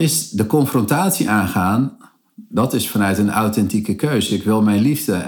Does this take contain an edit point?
no; 0 cuts

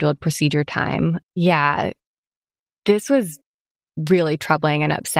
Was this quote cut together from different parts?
yes; 1 cut; at 1.2 s

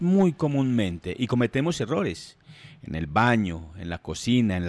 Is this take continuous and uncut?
yes; 0 cuts

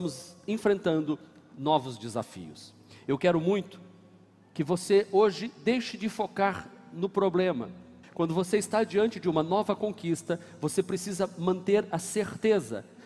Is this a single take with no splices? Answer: no; 1 cut; at 8.0 s

